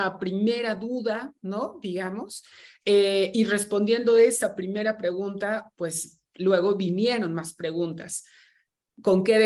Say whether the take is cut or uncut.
uncut